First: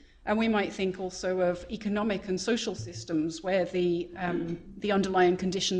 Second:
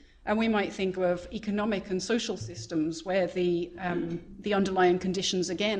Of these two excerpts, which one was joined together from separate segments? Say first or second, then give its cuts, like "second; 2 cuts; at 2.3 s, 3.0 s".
second; 1 cut; at 1.0 s